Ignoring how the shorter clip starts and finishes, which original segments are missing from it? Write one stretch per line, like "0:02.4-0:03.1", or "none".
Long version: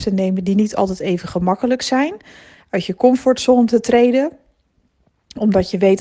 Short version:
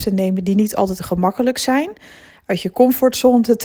0:01.0-0:01.2